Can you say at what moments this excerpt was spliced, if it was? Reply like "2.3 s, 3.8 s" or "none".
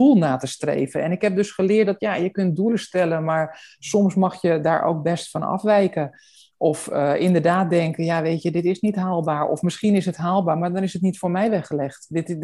none